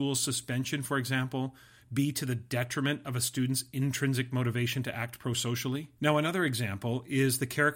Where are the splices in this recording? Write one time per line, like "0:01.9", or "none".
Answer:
0:06.0